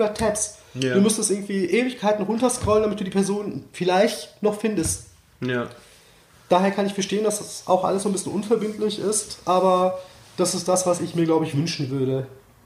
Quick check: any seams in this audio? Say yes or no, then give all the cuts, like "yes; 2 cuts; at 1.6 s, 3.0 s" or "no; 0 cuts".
no; 0 cuts